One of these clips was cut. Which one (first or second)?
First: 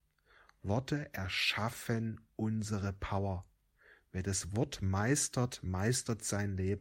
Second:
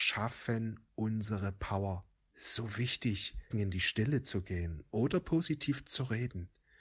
second